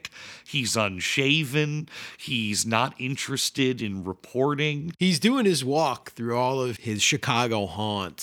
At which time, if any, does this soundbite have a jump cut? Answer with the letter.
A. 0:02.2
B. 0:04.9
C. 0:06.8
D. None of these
C